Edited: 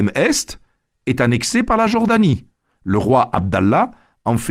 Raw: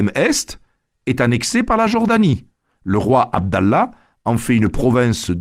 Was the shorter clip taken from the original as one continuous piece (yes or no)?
yes